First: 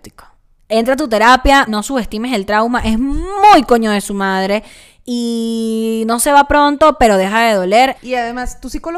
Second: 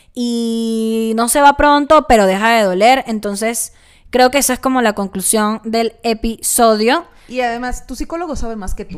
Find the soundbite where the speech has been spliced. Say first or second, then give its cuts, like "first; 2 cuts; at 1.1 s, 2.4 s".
first; 2 cuts; at 1.7 s, 7.9 s